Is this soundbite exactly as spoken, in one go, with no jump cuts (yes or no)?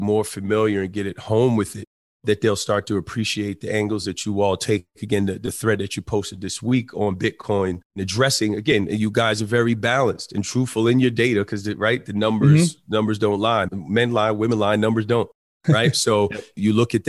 no